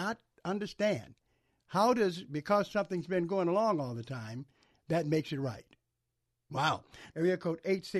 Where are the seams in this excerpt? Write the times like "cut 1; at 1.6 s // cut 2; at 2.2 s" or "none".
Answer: cut 1; at 7.1 s